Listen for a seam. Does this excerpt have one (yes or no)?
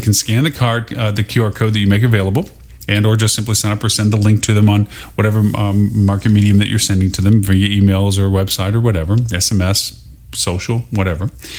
no